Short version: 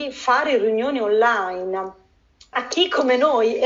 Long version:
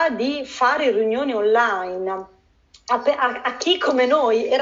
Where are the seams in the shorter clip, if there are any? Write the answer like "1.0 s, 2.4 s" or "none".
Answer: 2.5 s